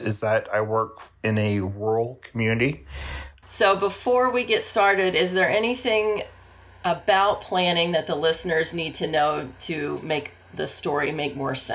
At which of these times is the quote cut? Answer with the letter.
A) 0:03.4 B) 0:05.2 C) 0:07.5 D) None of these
A